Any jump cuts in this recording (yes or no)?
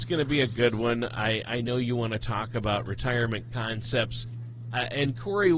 no